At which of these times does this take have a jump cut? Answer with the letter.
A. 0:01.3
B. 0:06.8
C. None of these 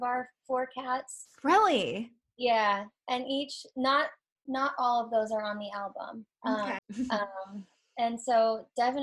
B